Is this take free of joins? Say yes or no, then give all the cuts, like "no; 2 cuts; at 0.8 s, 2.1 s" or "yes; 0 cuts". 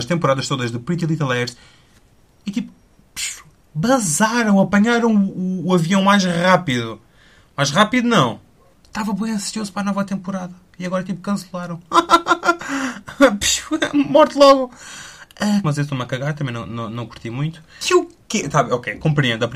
no; 3 cuts; at 8.7 s, 15.6 s, 17.8 s